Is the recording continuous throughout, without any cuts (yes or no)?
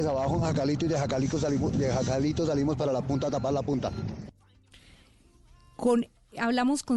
yes